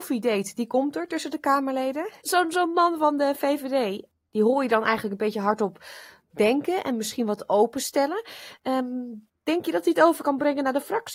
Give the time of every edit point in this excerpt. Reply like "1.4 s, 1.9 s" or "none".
2.2 s